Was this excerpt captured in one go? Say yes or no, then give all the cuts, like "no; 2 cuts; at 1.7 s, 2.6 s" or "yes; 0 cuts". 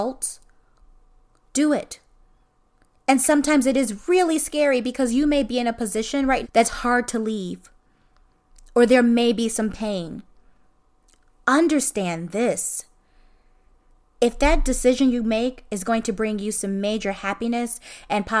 no; 1 cut; at 6.4 s